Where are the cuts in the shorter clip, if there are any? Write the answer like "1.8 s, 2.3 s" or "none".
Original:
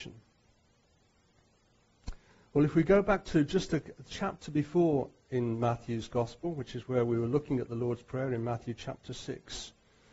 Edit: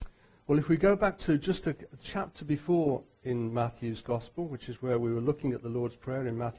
none